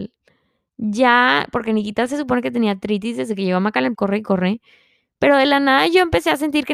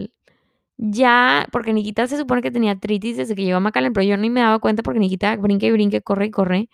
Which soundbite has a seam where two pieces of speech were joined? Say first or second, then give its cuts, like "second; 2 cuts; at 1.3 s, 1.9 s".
first; 1 cut; at 3.9 s